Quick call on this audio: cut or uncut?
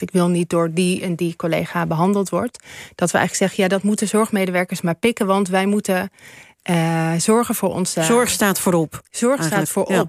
uncut